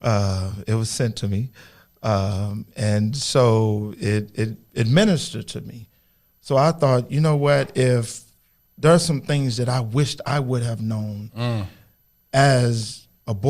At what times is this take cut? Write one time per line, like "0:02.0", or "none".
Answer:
none